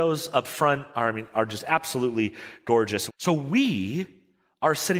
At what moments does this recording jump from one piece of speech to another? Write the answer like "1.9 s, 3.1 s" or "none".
3.1 s